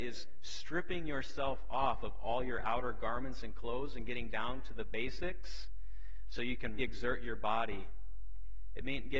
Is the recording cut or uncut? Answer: cut